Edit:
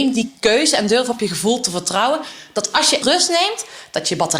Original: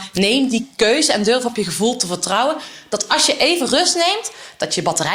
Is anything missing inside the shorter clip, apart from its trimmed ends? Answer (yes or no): yes